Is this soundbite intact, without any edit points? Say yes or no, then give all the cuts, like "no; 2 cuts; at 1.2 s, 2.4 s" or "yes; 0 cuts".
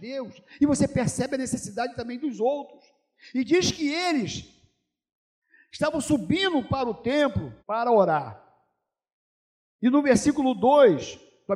no; 1 cut; at 7.6 s